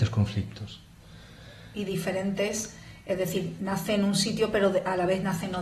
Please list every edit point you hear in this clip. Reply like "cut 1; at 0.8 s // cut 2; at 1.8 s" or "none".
cut 1; at 3.6 s